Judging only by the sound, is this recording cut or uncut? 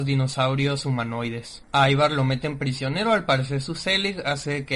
cut